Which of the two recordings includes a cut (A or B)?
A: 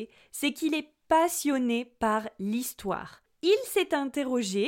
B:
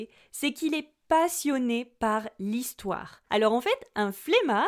B